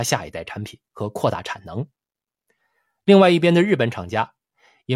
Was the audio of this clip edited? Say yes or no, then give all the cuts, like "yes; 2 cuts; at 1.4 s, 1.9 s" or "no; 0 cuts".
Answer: no; 0 cuts